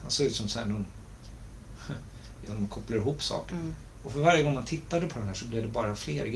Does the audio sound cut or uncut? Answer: cut